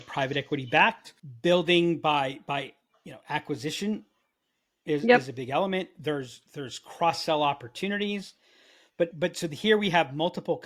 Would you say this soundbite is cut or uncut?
cut